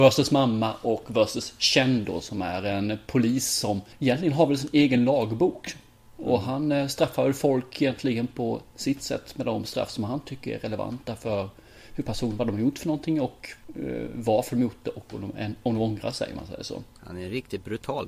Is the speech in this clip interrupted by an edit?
no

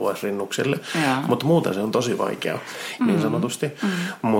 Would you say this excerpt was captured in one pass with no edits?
no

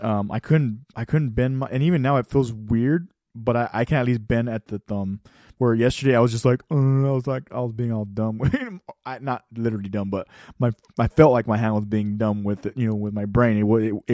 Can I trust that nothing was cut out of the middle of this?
yes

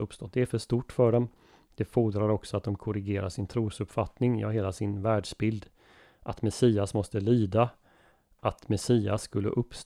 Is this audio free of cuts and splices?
yes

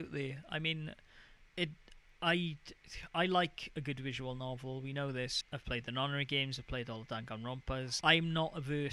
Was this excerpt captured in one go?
no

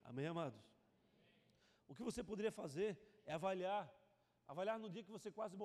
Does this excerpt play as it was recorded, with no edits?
yes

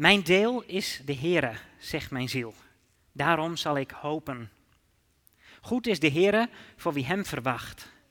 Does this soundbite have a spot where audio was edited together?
no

